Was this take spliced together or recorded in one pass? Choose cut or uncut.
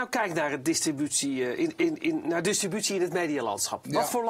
uncut